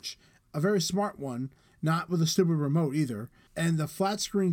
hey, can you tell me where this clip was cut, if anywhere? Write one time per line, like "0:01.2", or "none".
0:03.5